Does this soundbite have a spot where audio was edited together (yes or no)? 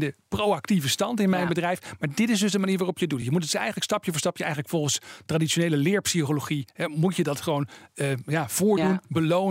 no